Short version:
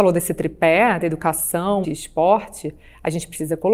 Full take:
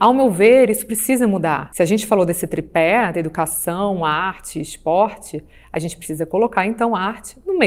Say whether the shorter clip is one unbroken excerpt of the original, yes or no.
no